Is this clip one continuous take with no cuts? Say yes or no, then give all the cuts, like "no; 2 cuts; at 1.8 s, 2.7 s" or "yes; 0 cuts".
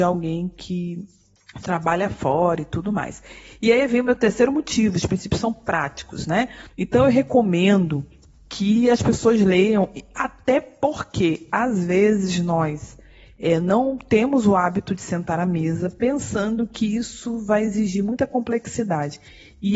no; 1 cut; at 6.7 s